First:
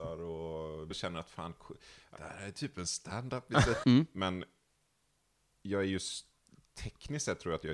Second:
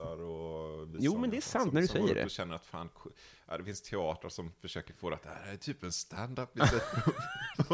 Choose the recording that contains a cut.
first; 3 cuts; at 0.9 s, 2.2 s, 3.8 s

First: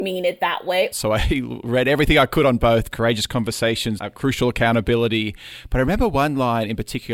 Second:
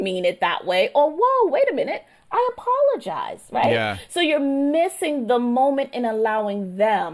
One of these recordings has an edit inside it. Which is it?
first; 3 cuts; at 0.9 s, 2.9 s, 4.0 s

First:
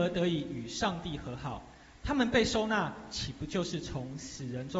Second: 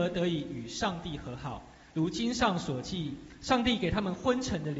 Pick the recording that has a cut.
second; 1 cut; at 1.9 s

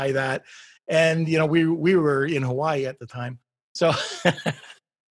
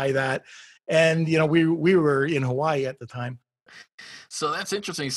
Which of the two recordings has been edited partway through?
second; 1 cut; at 3.7 s

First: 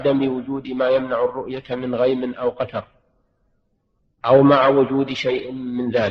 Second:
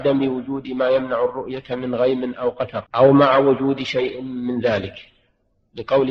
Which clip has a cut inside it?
second; 1 cut; at 2.9 s

